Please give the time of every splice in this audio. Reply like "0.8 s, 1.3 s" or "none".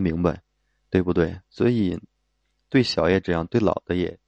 none